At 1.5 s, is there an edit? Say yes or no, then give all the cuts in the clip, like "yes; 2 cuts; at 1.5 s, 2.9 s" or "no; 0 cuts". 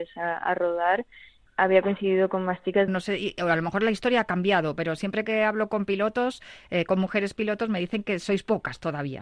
yes; 2 cuts; at 1.5 s, 2.9 s